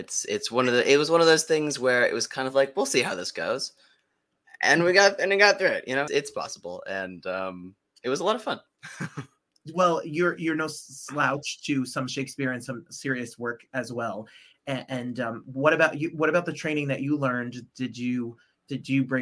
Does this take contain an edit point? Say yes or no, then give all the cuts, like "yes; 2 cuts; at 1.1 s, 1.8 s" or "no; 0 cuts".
yes; 1 cut; at 6.1 s